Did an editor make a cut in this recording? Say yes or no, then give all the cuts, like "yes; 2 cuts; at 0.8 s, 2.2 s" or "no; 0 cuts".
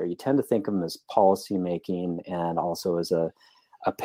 no; 0 cuts